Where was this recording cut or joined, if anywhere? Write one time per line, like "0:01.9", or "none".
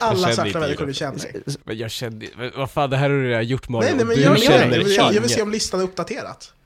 0:01.6